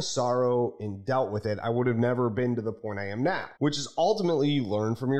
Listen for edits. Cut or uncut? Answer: cut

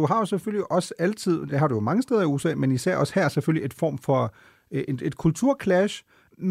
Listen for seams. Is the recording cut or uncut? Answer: uncut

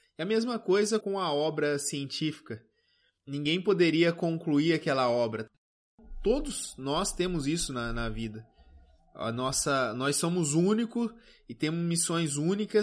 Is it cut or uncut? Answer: cut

